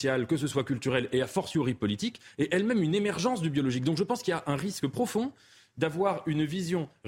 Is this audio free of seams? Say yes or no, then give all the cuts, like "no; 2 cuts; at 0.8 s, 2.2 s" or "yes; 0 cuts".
yes; 0 cuts